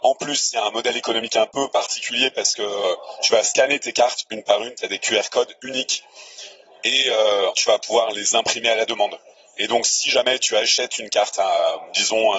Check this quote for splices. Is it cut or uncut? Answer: cut